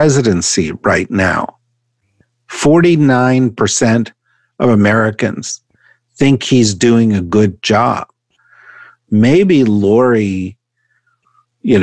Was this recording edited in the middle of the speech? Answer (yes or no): no